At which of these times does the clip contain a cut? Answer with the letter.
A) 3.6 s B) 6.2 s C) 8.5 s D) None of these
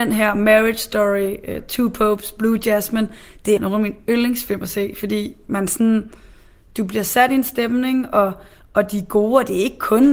A